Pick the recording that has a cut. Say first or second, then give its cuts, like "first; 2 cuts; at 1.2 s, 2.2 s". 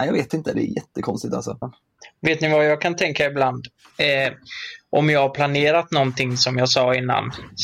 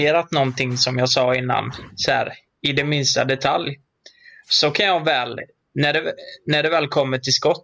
first; 1 cut; at 1.6 s